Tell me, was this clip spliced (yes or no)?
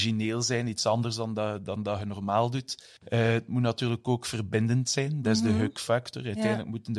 yes